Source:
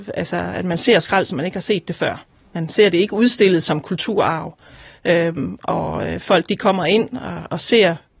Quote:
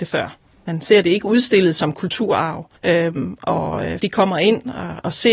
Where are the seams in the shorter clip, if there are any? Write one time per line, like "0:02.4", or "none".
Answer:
0:02.8
0:04.0